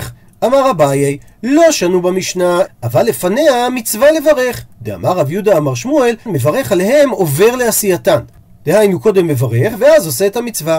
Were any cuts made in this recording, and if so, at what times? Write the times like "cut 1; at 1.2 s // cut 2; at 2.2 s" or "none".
cut 1; at 2.7 s // cut 2; at 6.3 s

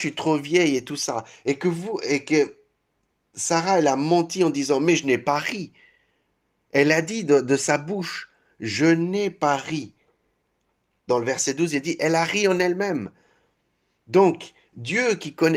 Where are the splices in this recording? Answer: cut 1; at 11.1 s

